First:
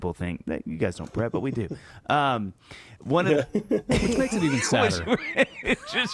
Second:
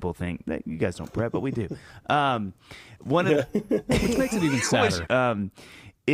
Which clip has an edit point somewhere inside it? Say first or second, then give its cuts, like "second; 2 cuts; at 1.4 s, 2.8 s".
second; 1 cut; at 5.1 s